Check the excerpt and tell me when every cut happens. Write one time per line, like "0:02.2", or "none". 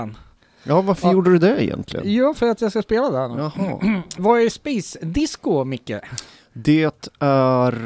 0:04.2